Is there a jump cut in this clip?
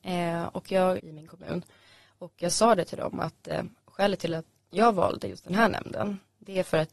yes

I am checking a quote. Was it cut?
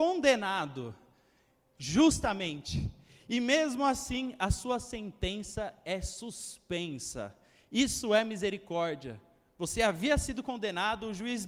no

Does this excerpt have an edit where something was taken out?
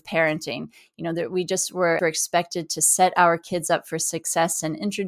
yes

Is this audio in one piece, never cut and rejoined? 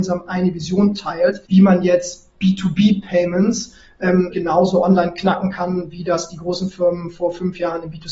no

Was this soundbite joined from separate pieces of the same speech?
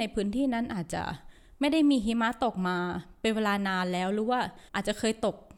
yes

